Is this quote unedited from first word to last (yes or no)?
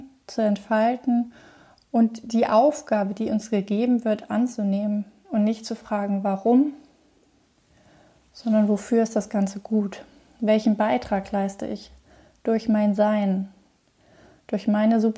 yes